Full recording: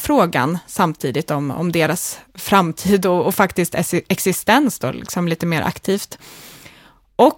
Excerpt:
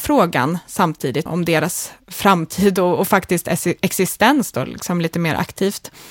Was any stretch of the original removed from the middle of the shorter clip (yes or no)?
yes